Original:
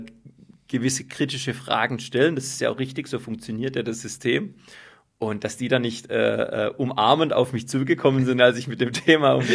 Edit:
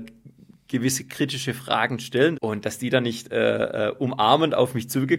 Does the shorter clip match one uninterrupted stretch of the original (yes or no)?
no